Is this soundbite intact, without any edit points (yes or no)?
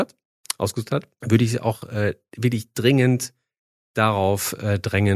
no